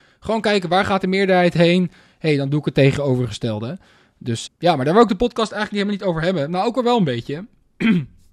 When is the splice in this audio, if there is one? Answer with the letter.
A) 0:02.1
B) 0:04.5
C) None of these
B